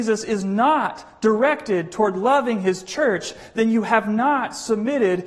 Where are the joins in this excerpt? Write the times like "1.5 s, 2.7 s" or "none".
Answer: none

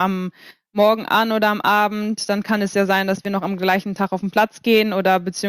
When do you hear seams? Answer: none

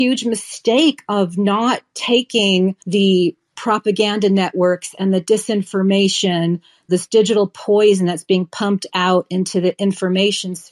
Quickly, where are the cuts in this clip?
2.8 s

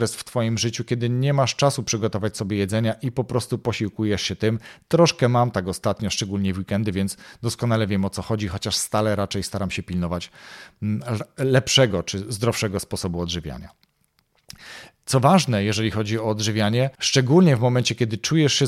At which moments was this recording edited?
16.9 s

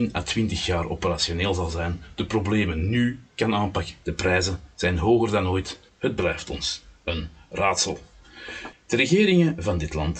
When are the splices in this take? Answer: 4.0 s, 5.9 s, 8.7 s

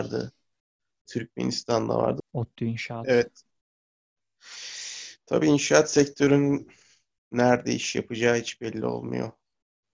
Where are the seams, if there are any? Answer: 1.1 s, 2.2 s

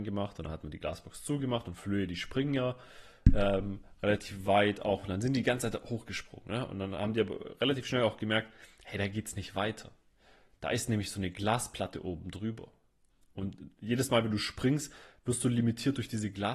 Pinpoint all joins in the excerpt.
none

